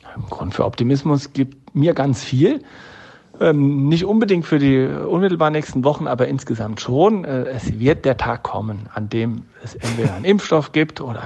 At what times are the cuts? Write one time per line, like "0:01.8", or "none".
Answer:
none